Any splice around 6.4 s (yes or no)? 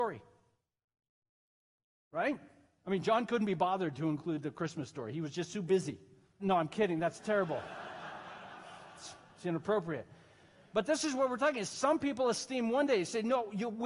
yes